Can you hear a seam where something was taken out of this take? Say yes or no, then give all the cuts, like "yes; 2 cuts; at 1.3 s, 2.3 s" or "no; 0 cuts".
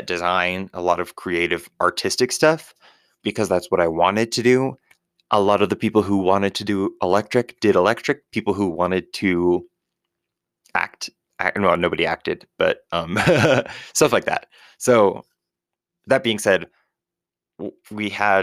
no; 0 cuts